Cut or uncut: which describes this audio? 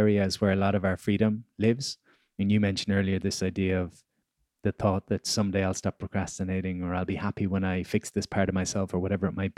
uncut